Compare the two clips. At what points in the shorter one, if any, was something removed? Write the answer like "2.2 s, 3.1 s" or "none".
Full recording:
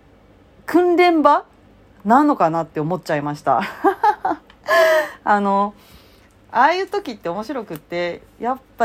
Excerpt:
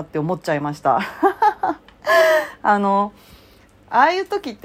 none